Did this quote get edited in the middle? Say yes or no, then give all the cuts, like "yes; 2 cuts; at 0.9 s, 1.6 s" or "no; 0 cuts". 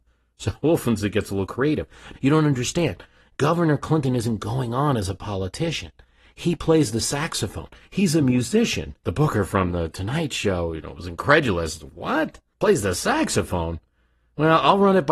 yes; 1 cut; at 2.1 s